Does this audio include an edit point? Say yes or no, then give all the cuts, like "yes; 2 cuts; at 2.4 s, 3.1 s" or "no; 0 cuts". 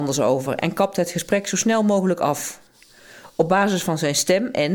no; 0 cuts